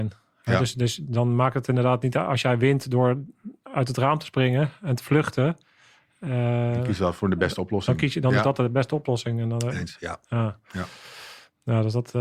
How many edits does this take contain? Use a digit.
0